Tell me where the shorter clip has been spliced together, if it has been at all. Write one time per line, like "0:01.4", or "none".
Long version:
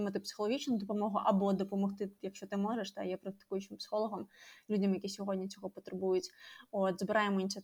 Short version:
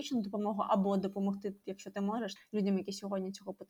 0:02.4